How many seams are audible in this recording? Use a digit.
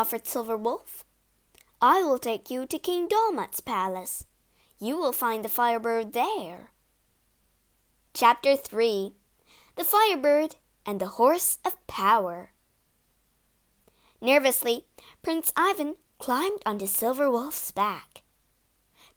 0